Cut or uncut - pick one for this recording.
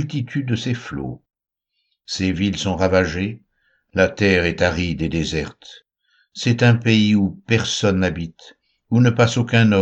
uncut